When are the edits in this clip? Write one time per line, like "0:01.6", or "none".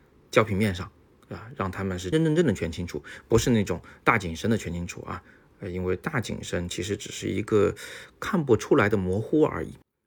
0:02.1